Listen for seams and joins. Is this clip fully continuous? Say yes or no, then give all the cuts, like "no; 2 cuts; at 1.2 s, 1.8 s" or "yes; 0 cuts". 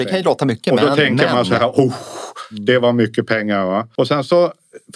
yes; 0 cuts